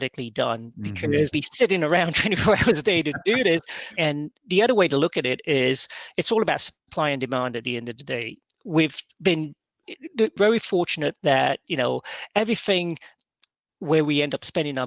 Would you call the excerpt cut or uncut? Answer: cut